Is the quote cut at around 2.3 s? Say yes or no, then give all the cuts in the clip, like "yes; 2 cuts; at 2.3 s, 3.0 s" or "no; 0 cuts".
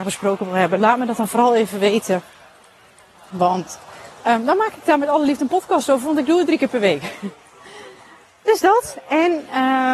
no; 0 cuts